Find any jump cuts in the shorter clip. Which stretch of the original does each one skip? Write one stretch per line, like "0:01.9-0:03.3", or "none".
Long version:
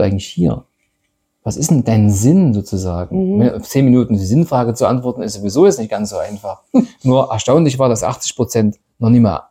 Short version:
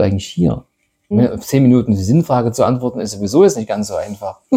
0:01.1-0:03.3